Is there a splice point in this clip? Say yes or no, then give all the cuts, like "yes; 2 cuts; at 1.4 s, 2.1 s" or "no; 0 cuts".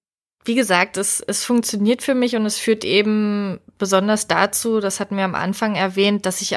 no; 0 cuts